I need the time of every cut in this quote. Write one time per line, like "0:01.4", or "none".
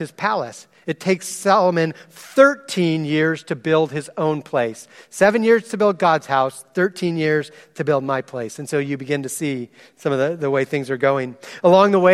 none